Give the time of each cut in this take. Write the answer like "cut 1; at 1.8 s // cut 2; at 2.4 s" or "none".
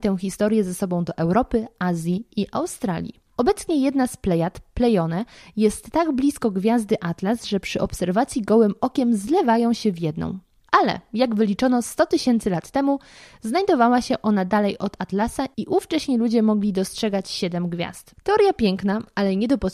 cut 1; at 18.2 s